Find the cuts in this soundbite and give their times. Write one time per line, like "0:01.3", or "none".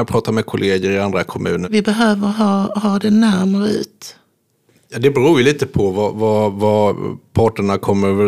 0:01.6